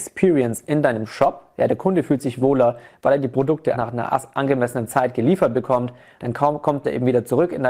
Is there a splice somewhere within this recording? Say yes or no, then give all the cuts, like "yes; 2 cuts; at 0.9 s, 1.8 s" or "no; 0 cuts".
yes; 2 cuts; at 3.7 s, 6.2 s